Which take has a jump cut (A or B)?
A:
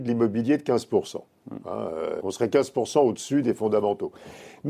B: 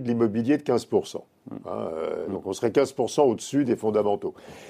A